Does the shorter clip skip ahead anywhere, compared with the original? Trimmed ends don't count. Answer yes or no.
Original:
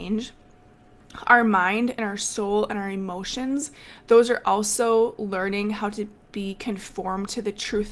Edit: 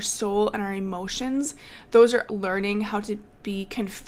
yes